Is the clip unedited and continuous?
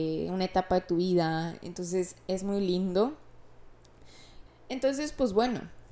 no; 1 cut; at 4.5 s

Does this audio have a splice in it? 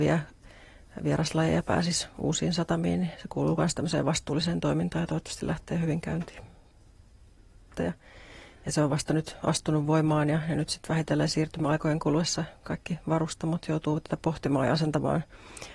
yes; 1 cut; at 7.7 s

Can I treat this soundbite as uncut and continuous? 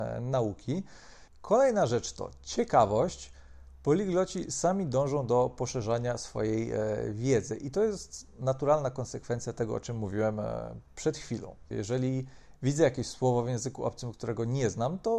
no; 2 cuts; at 1.3 s, 11.7 s

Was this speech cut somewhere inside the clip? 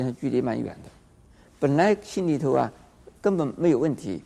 no; 0 cuts

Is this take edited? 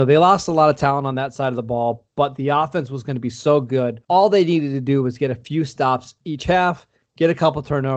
yes; 1 cut; at 4.0 s

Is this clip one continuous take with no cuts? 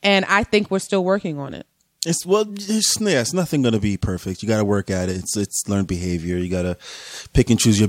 yes; 0 cuts

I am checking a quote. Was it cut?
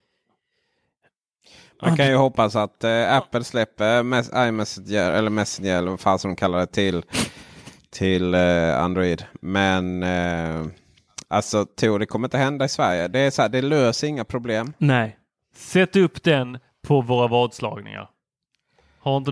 no; 0 cuts

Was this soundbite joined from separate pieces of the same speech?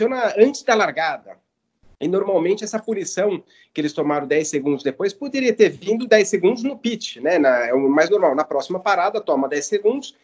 no; 0 cuts

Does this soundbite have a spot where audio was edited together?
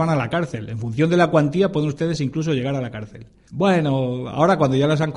yes; 1 cut; at 3.5 s

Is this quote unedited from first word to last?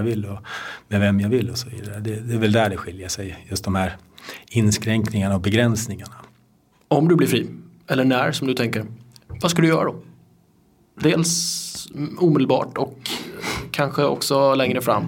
yes; 0 cuts

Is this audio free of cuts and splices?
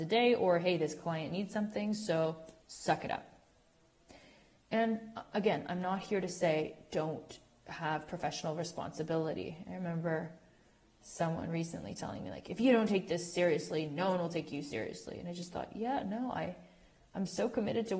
yes; 0 cuts

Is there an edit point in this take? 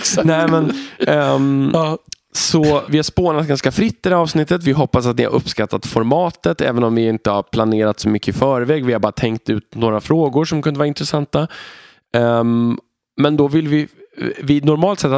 yes; 1 cut; at 2.9 s

